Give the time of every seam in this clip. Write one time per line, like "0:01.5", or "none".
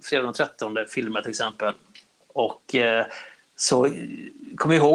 none